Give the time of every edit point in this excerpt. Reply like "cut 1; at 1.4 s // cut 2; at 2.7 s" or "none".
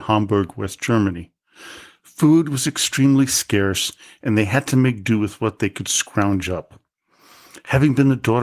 none